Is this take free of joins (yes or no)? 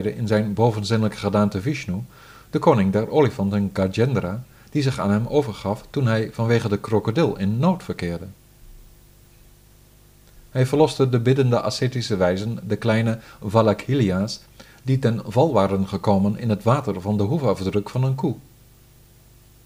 yes